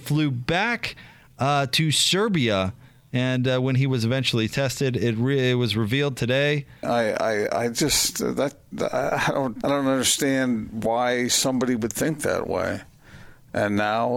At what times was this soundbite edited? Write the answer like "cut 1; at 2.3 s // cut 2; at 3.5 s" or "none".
cut 1; at 6.8 s // cut 2; at 9.6 s